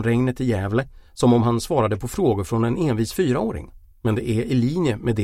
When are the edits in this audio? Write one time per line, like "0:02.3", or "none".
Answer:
0:03.9